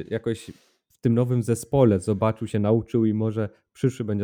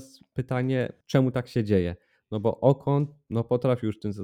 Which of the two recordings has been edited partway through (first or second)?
second